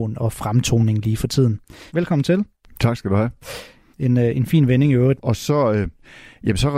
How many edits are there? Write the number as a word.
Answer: three